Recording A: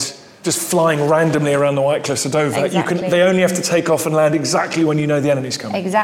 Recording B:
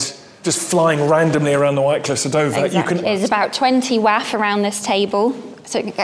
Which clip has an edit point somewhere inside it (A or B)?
B